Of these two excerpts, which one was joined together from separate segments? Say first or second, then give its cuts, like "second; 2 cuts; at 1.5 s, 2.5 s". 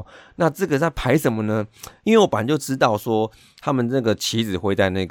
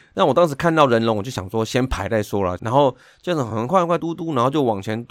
second; 2 cuts; at 2.6 s, 4.0 s